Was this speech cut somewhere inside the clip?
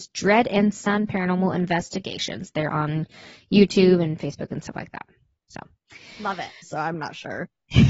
yes; 1 cut; at 6.6 s

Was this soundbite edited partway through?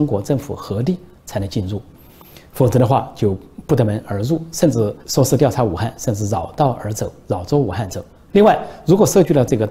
yes; 2 cuts; at 5.0 s, 8.3 s

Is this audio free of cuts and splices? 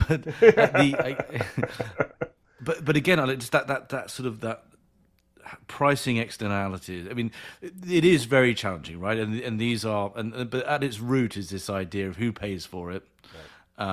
yes; 0 cuts

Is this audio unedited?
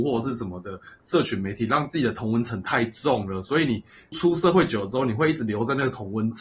no; 1 cut; at 4.1 s

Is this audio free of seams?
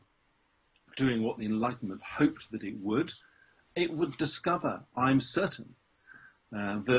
yes; 0 cuts

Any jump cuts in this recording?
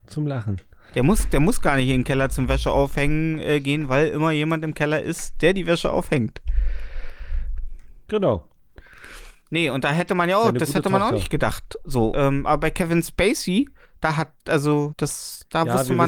yes; 2 cuts; at 12.1 s, 14.9 s

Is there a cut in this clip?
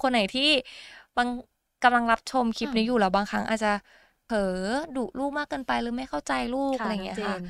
no; 0 cuts

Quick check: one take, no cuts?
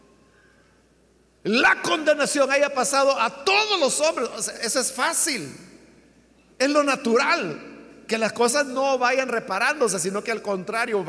no; 2 cuts; at 4.5 s, 6.5 s

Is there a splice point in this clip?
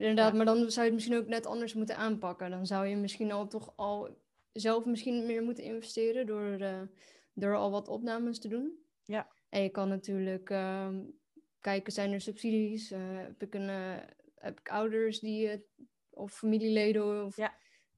no; 0 cuts

